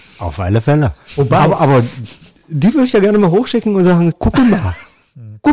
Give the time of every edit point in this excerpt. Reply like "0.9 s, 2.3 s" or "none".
4.1 s